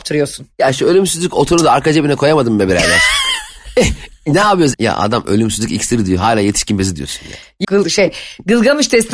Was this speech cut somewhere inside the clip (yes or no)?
yes